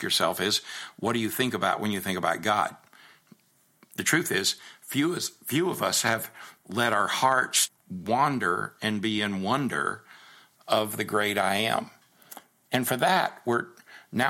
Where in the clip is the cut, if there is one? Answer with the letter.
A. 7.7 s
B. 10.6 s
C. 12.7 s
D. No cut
A